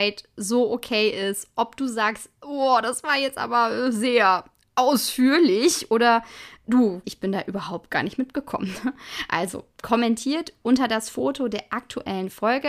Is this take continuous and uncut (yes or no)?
no